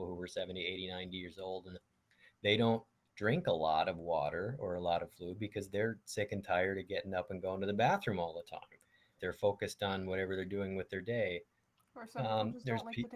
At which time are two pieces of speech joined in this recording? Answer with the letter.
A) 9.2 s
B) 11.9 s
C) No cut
A